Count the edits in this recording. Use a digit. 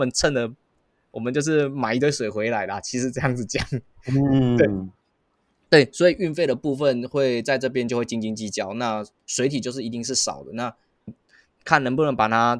1